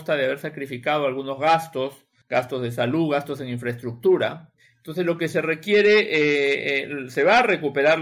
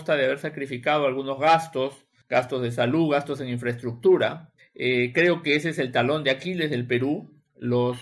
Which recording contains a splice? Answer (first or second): second